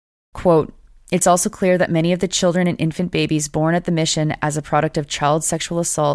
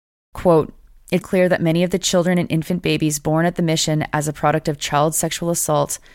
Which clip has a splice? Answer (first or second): second